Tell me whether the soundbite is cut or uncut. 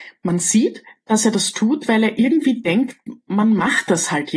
uncut